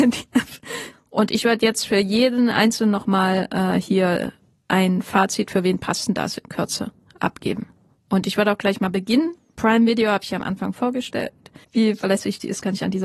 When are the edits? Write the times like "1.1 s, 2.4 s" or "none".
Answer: 0.9 s, 11.6 s